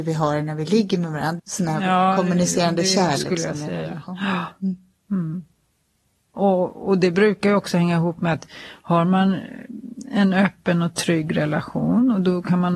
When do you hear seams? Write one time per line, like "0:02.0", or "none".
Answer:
0:01.4